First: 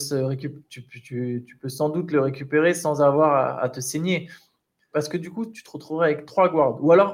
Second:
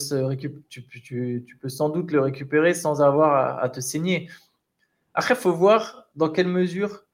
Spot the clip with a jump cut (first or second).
first